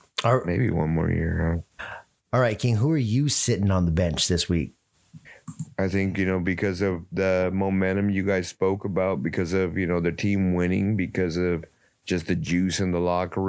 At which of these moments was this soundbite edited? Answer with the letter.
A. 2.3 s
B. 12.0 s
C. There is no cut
C